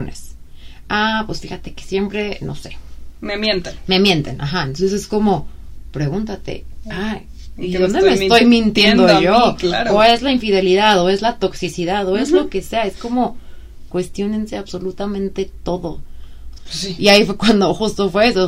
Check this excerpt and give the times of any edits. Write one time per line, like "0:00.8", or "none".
0:13.9
0:16.6

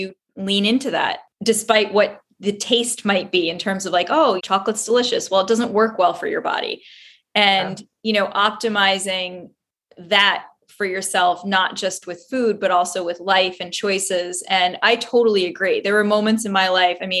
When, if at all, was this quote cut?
0:04.4

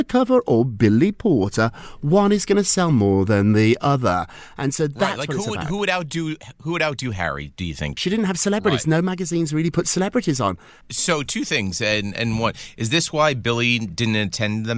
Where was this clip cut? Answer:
0:08.0
0:10.8

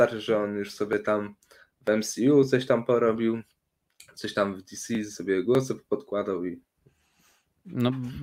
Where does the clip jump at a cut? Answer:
none

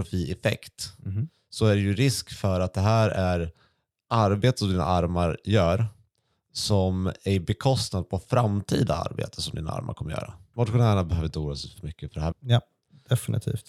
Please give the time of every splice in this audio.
0:10.5
0:12.3

